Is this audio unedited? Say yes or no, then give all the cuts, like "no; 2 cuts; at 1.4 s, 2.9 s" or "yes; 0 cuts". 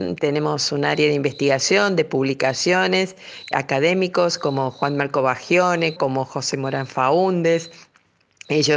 no; 2 cuts; at 3.5 s, 6.0 s